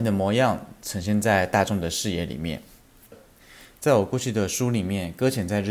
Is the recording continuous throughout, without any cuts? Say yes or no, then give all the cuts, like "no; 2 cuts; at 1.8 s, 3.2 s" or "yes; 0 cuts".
yes; 0 cuts